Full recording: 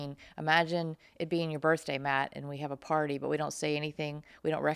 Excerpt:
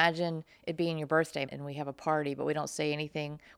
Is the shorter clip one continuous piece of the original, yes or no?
no